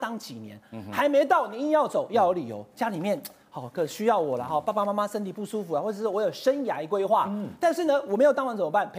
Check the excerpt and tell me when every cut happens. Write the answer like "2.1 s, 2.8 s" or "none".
none